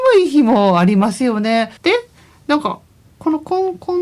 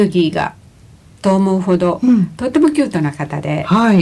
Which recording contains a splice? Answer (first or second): first